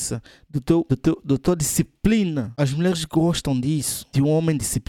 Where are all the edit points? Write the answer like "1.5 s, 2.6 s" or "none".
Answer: none